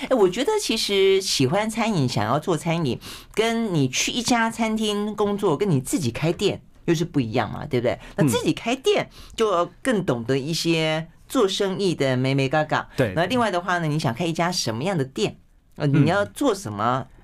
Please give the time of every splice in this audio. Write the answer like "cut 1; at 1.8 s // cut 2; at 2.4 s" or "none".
none